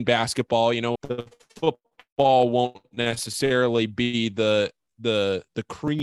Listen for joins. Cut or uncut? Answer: cut